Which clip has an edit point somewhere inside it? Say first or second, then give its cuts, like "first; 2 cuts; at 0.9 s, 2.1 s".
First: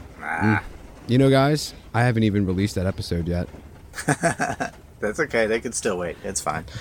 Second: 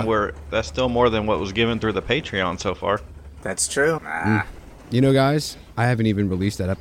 second; 1 cut; at 4.0 s